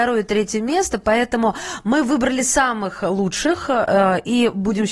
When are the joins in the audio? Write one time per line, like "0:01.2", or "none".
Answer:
none